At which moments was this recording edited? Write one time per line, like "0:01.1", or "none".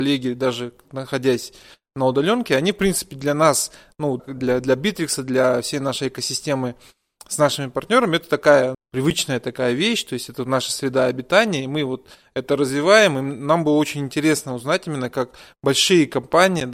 0:04.2
0:08.7